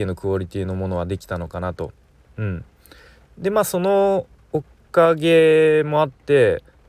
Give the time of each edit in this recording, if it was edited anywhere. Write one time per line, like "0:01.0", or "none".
0:02.2